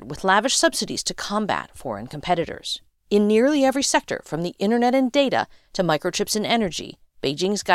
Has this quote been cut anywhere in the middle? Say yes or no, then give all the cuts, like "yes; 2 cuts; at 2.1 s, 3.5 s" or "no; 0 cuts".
no; 0 cuts